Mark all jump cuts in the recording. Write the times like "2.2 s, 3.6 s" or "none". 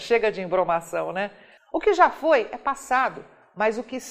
1.6 s